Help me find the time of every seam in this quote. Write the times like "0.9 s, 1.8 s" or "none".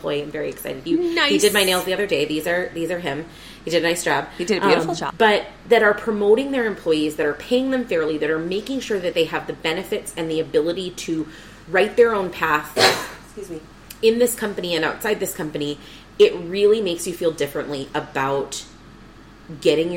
5.1 s